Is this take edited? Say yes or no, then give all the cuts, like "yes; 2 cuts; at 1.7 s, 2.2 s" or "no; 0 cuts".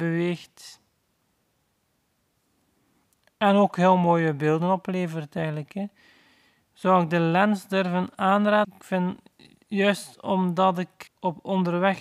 yes; 2 cuts; at 8.6 s, 11.1 s